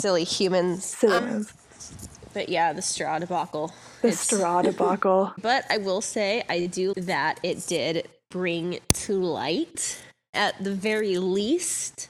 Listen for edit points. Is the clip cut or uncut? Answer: cut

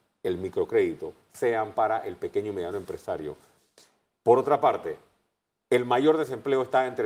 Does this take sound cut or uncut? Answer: uncut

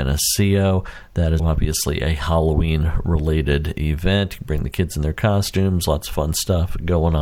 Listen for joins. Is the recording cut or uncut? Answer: cut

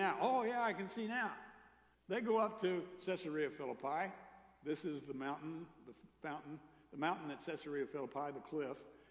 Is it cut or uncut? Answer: cut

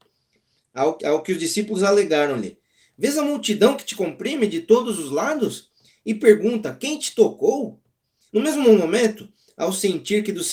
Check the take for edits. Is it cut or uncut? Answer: cut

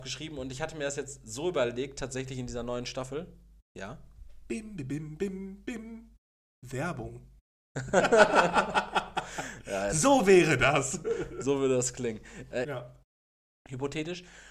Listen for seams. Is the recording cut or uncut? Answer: cut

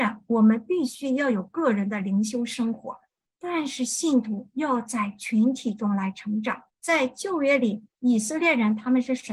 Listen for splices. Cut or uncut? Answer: cut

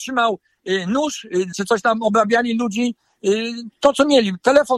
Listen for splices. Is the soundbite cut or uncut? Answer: cut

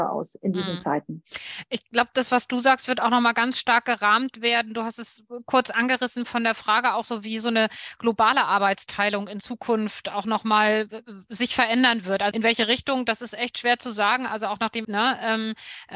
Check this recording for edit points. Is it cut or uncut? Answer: cut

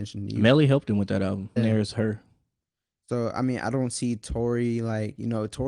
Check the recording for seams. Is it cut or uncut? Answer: cut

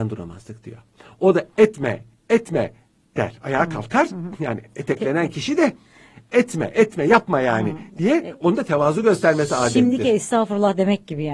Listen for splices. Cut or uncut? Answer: uncut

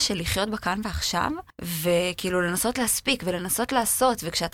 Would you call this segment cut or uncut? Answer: cut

